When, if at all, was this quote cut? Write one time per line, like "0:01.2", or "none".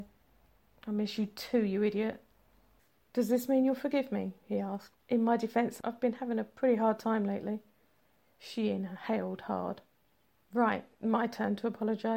none